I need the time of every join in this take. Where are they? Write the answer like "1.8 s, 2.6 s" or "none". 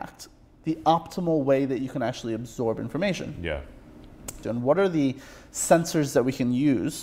4.4 s